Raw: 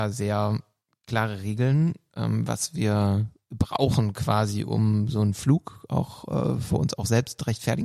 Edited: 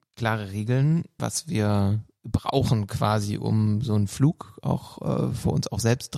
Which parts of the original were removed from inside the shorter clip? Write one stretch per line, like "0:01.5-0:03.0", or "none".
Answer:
0:02.1-0:02.5